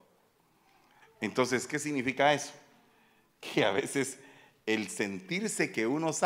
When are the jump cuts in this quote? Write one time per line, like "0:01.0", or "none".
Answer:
0:01.0